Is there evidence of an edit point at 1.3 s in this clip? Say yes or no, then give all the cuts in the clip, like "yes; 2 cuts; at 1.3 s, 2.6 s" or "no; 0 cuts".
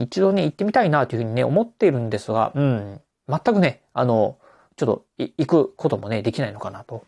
no; 0 cuts